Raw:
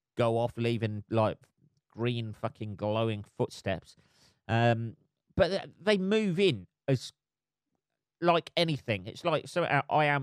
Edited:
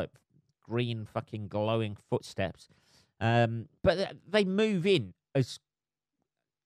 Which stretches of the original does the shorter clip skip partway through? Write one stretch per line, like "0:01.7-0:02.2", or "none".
0:05.1-0:05.3